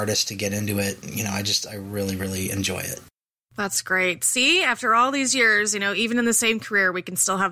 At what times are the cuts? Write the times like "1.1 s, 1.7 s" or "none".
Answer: none